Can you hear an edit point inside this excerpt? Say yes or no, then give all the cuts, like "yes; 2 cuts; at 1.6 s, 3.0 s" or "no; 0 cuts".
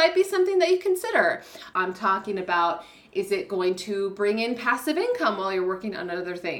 yes; 1 cut; at 1.7 s